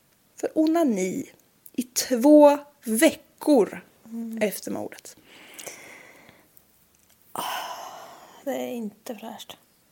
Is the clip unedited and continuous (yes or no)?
yes